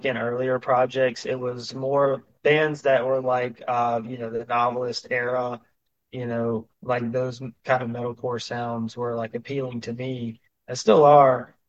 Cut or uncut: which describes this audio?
uncut